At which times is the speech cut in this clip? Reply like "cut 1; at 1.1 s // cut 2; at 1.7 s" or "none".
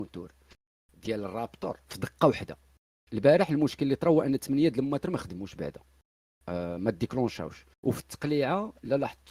cut 1; at 7.7 s